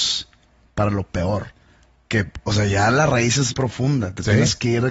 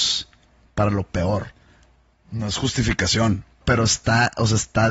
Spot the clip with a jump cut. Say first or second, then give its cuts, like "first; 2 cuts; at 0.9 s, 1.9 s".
first; 2 cuts; at 2.1 s, 3.5 s